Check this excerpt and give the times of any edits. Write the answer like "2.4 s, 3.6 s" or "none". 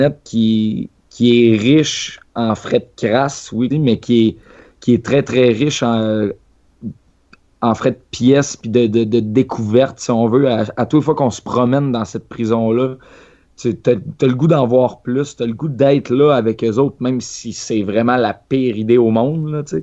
3.7 s